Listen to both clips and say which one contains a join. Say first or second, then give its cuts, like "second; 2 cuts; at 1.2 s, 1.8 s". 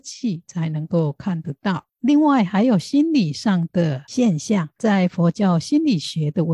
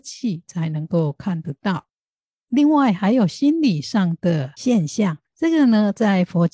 first; 2 cuts; at 1.9 s, 4.8 s